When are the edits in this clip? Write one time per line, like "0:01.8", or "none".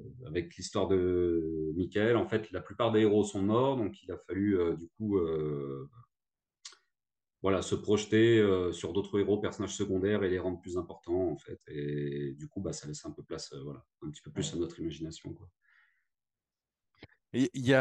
none